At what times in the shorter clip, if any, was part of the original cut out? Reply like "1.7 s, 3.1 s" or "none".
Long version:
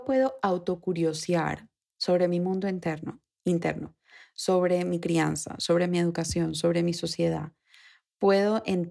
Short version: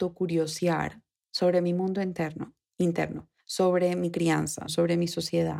3.4 s, 4.7 s

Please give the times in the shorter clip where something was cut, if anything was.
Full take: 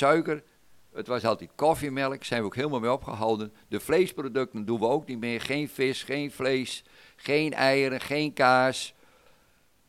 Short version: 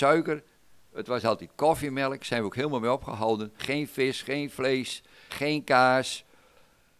3.6 s, 5.3 s

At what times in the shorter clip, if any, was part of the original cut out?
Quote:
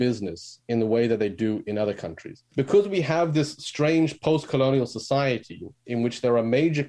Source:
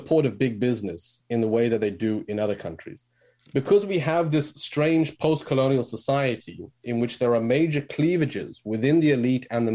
2.5 s

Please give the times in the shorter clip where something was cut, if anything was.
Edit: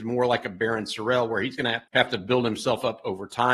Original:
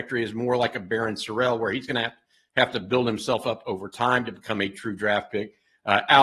1.9 s

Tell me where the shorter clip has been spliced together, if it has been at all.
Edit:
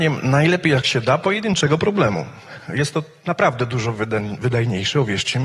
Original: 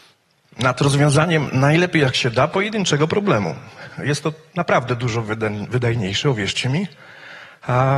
none

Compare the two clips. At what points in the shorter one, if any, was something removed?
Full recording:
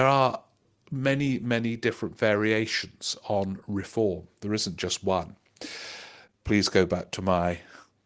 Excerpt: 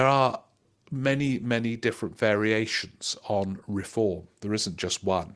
none

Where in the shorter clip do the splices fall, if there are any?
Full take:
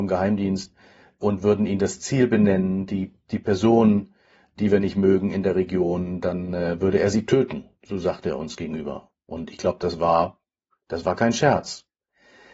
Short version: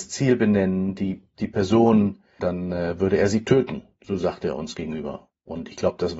2.4 s

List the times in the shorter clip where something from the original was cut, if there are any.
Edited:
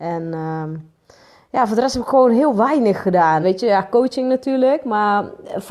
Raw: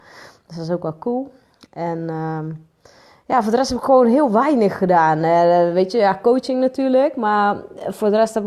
3.4 s

